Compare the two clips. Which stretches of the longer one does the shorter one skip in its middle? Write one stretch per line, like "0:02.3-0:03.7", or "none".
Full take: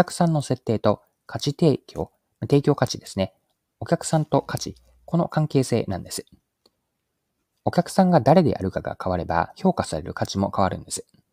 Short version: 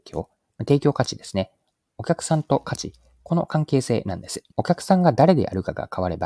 0:06.3-0:07.6